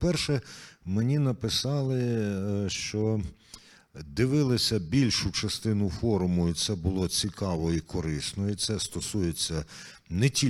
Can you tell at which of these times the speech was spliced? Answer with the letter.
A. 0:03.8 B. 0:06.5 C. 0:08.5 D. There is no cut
D